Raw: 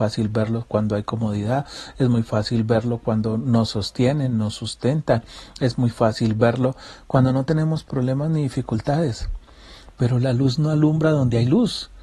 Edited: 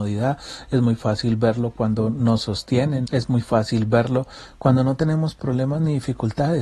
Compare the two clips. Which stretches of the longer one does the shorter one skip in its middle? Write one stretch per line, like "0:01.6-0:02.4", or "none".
0:04.3-0:05.5